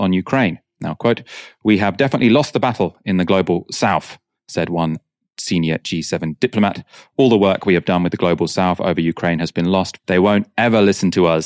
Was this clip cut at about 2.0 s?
no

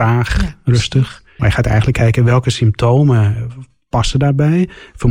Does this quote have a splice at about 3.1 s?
no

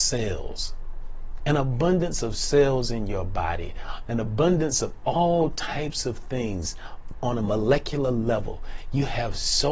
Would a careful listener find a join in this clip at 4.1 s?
yes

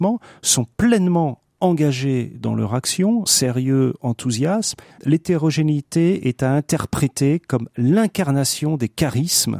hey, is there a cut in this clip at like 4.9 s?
yes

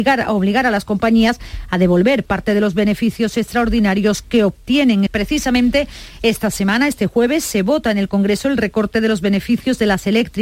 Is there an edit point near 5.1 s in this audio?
yes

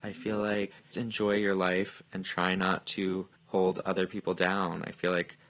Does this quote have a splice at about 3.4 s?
yes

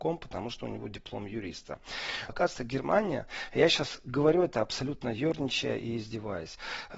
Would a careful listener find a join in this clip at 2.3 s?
yes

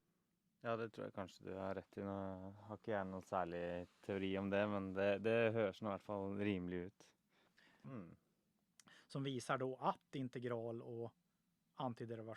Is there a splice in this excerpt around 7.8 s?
yes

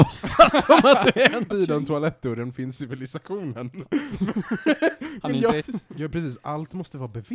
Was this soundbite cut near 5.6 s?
yes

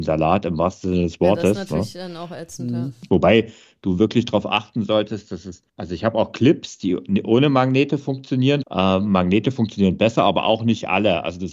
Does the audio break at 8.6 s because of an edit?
yes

